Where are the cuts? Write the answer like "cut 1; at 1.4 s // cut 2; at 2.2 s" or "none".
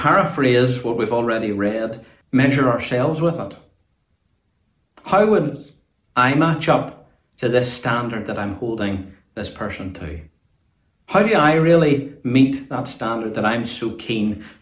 cut 1; at 2.2 s